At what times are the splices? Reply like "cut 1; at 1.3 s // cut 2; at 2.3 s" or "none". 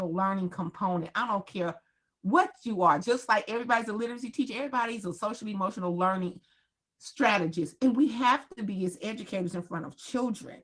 none